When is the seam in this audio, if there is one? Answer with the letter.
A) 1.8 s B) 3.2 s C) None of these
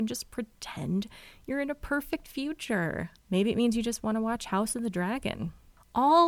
B